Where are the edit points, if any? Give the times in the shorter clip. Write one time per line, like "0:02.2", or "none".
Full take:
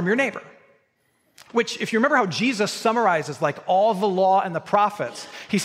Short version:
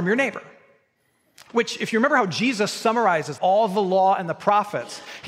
0:03.4